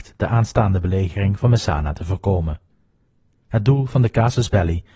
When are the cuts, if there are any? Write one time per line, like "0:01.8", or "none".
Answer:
none